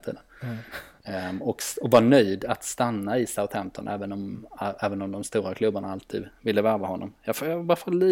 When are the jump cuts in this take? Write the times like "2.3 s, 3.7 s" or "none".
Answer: none

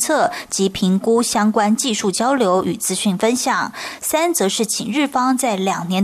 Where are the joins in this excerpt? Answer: none

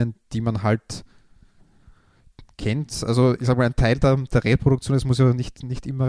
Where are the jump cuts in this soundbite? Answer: none

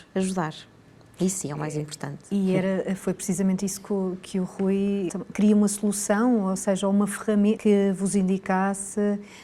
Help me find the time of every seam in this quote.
5.1 s, 7.6 s

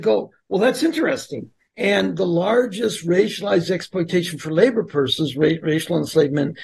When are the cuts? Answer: 1.6 s

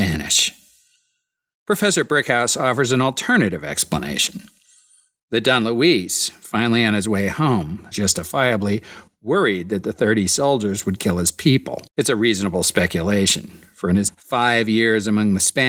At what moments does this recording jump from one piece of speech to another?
7.9 s, 11.9 s, 14.1 s

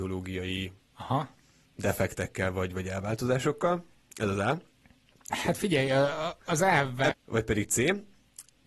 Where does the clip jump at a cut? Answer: 5.3 s, 7.1 s

